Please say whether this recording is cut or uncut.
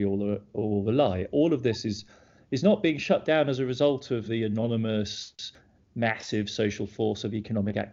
cut